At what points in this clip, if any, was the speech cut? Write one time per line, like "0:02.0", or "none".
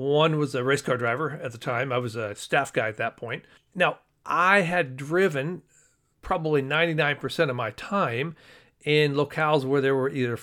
0:03.6

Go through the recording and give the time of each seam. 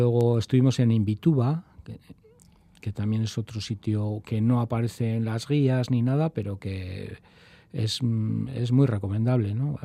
none

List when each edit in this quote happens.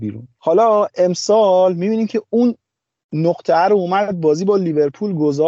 none

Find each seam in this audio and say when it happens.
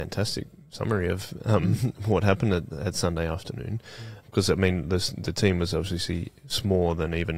0:04.2

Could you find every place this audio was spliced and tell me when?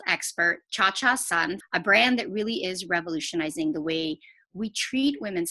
0:01.6

